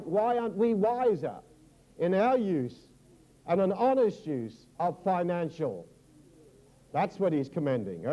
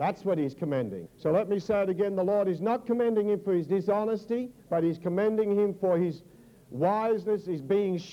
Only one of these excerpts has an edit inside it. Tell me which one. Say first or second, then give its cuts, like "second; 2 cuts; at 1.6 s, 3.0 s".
second; 2 cuts; at 1.1 s, 4.6 s